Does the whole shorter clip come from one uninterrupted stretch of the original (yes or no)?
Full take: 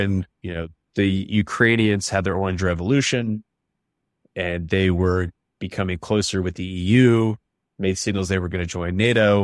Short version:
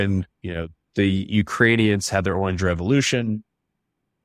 yes